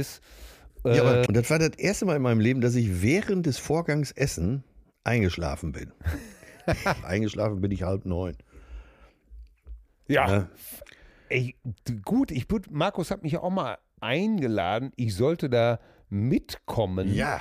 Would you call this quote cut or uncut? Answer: cut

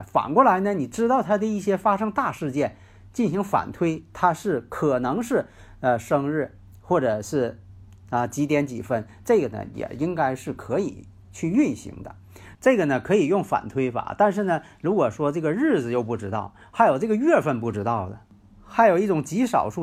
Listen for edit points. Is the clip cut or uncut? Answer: cut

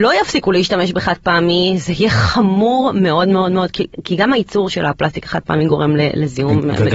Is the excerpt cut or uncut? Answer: uncut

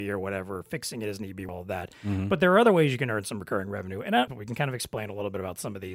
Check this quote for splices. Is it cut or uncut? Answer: cut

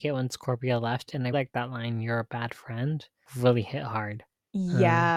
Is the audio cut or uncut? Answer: cut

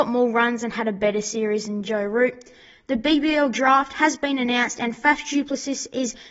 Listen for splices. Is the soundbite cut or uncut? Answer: uncut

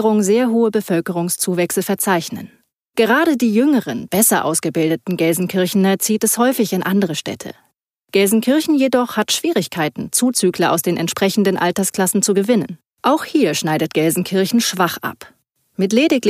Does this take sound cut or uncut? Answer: cut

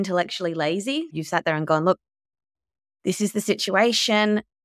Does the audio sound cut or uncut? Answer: cut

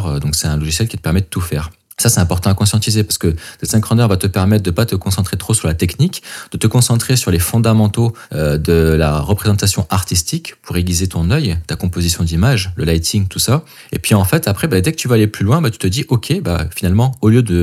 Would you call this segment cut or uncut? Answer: uncut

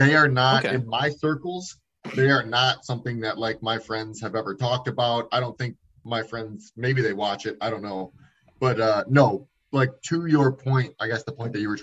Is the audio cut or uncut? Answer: uncut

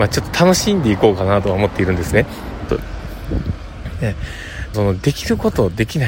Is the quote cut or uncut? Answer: cut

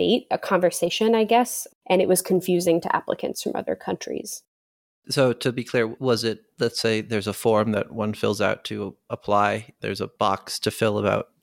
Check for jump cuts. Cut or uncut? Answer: uncut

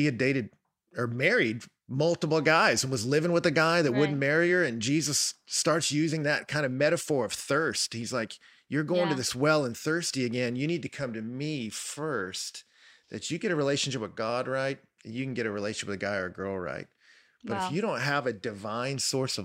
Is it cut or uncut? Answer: uncut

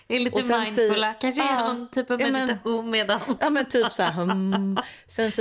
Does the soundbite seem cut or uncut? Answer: uncut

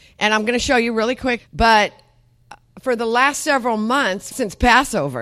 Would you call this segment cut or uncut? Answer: cut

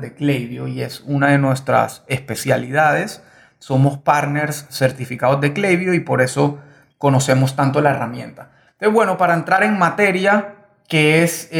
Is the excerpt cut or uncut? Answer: uncut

